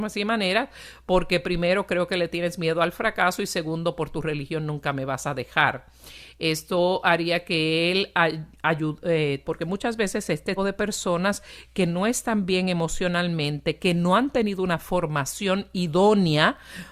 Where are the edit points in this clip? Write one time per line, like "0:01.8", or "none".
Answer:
0:09.4
0:10.6